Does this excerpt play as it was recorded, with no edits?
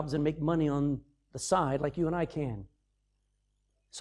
yes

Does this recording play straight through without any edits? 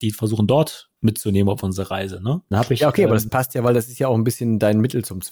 no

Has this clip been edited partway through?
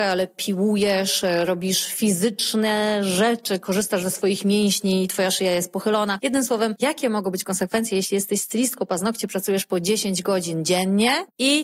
no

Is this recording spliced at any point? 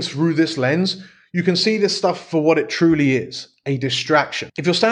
no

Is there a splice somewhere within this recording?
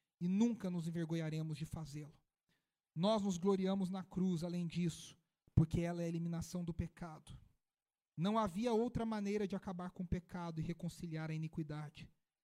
no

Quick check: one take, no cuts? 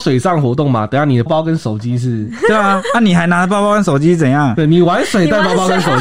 no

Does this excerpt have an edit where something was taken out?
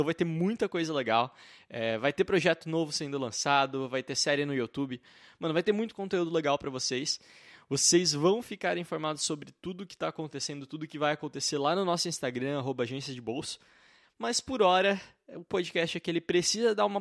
no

